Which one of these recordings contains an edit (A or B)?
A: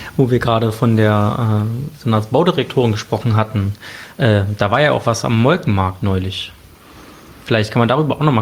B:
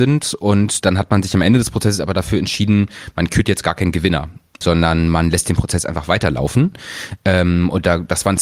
B